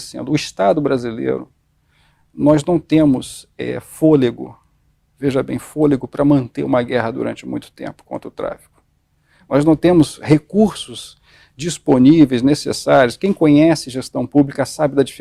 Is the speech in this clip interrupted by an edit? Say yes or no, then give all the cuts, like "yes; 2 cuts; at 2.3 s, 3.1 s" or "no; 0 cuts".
no; 0 cuts